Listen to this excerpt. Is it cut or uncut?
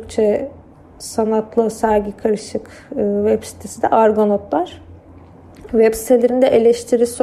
cut